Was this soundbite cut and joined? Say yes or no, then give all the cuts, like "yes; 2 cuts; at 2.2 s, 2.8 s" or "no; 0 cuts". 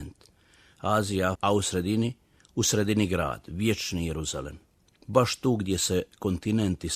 yes; 1 cut; at 1.3 s